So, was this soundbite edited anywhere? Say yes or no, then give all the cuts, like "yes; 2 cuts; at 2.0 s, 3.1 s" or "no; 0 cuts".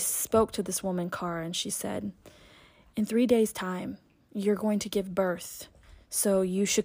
no; 0 cuts